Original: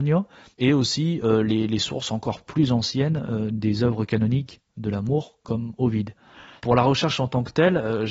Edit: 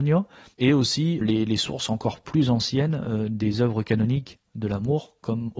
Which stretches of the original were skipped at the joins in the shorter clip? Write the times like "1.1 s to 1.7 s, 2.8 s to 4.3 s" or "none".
1.2 s to 1.4 s